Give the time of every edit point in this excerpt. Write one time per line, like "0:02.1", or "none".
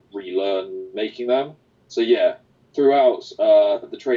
none